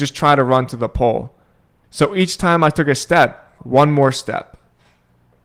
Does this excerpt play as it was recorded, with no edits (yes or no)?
no